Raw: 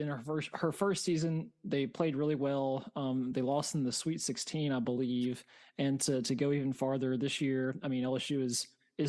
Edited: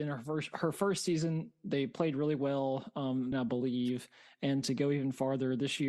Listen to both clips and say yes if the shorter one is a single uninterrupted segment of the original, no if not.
no